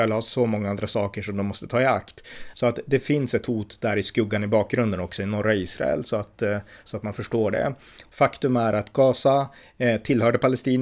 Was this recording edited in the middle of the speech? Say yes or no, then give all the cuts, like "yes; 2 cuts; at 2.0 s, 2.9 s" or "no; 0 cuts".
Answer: yes; 2 cuts; at 2.5 s, 8.1 s